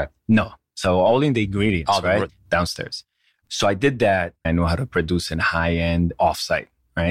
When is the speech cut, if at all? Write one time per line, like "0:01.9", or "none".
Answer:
0:02.3
0:04.4